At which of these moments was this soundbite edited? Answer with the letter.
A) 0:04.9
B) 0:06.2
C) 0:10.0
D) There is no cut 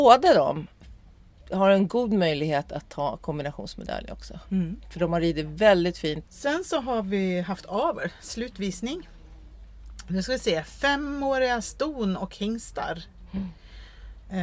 B